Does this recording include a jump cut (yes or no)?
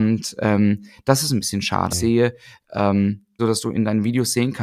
yes